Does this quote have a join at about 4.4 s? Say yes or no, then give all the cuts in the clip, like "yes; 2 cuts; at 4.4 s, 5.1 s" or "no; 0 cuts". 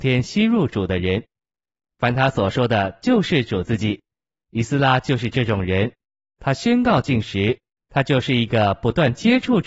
yes; 2 cuts; at 4.4 s, 7.8 s